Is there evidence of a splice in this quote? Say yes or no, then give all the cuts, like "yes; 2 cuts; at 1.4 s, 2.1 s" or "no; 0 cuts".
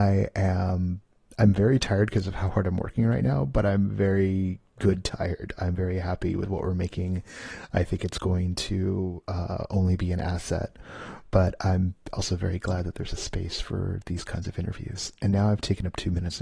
no; 0 cuts